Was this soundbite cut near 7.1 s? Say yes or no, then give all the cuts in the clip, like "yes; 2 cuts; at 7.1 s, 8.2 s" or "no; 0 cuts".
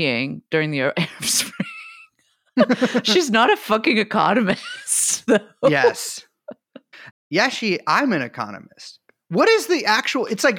yes; 1 cut; at 7.1 s